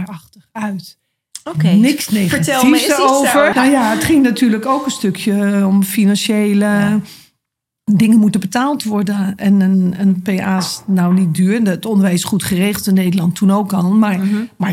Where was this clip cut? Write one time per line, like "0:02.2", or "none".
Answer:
0:03.5